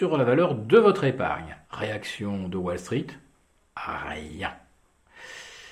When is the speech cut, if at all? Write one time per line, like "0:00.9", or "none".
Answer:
0:01.6